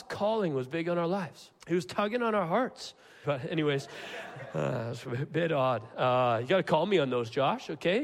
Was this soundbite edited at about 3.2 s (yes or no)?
yes